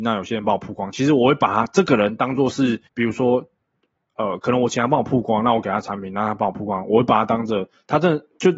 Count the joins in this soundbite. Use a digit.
1